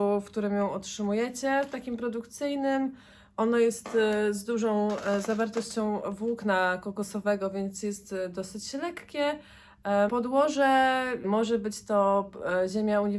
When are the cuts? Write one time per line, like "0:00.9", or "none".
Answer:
0:10.1
0:11.2